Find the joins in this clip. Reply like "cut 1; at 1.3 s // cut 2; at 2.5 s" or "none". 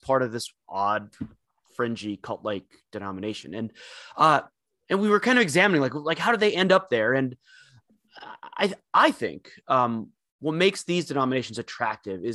none